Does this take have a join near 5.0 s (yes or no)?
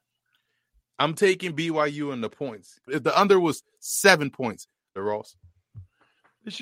yes